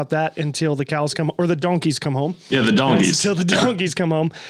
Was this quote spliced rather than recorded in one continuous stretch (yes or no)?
no